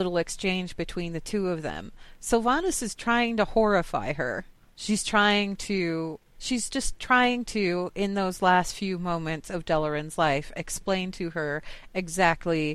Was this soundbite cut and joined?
yes; 1 cut; at 6.4 s

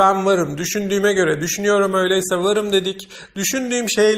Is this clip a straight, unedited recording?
yes; 0 cuts

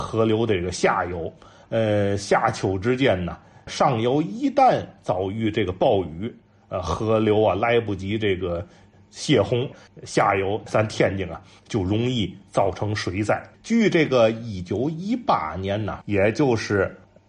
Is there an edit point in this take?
yes; 3 cuts; at 9.9 s, 13.5 s, 16.0 s

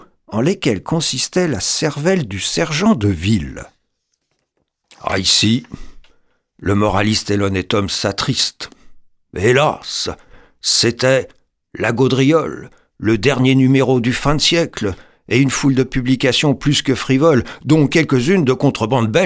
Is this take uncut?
yes; 0 cuts

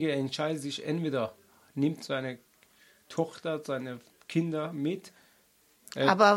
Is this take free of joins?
yes; 0 cuts

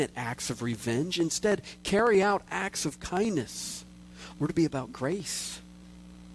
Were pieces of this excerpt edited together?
yes; 1 cut; at 4.3 s

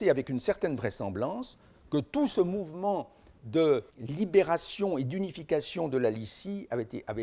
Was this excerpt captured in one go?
no; 1 cut; at 3.9 s

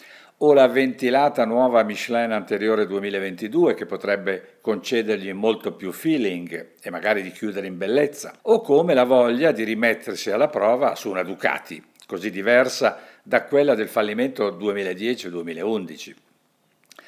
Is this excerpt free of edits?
no; 1 cut; at 8.4 s

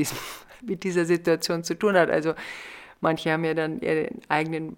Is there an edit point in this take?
no; 0 cuts

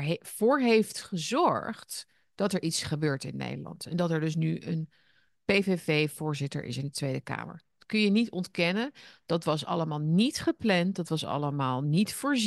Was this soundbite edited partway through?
no; 0 cuts

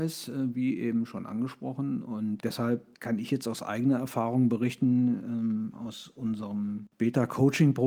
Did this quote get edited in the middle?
yes; 1 cut; at 2.9 s

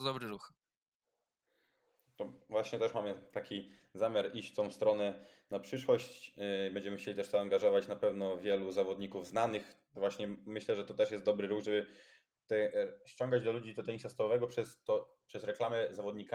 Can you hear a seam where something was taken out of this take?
no; 0 cuts

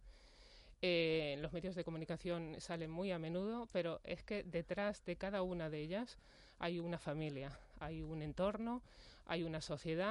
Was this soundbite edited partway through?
no; 0 cuts

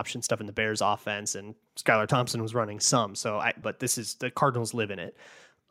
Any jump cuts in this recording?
yes; 1 cut; at 3.6 s

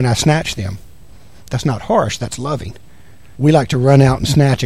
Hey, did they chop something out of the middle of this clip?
yes; 1 cut; at 3.3 s

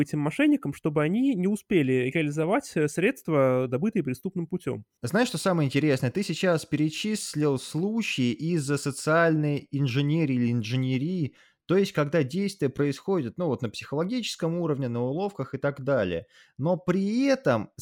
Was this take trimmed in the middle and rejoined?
yes; 1 cut; at 5.0 s

